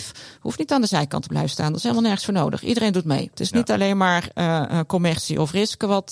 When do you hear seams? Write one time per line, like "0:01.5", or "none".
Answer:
none